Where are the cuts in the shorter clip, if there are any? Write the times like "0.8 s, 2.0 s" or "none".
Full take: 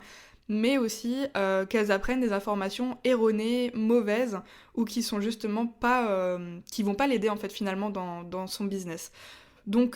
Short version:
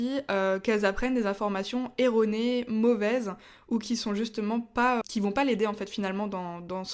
5.0 s